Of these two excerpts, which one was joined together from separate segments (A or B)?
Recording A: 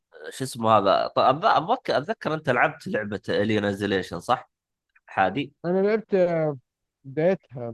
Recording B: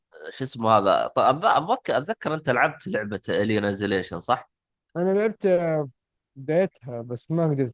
B